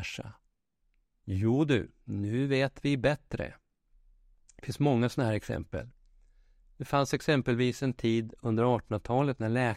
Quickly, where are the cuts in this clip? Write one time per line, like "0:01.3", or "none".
0:01.2